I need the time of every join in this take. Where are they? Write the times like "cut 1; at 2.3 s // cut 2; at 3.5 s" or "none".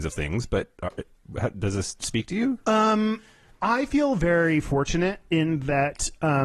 none

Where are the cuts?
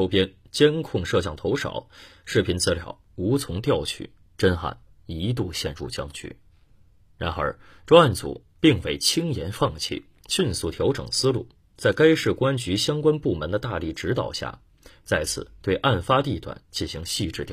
none

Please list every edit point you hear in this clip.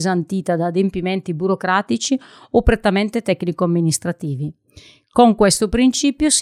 none

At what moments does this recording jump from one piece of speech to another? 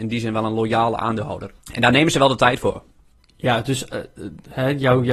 cut 1; at 1.6 s

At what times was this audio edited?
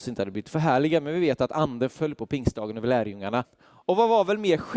cut 1; at 3.4 s

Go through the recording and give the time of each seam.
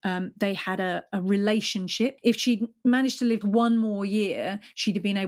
cut 1; at 2.2 s // cut 2; at 3.4 s

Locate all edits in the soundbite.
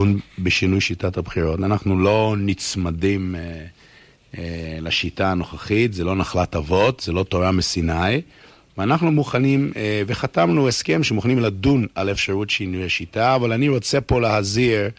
none

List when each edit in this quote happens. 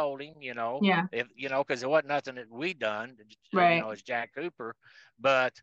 none

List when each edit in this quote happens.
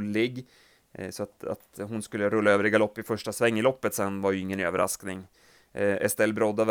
none

